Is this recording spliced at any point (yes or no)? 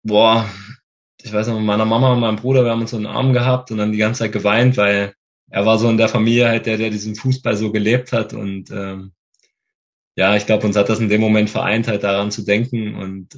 no